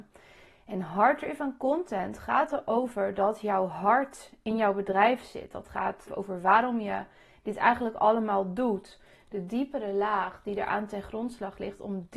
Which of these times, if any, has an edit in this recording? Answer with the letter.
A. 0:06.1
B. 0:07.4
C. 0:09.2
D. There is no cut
A